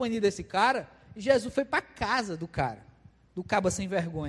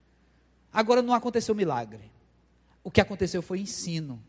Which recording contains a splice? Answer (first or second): first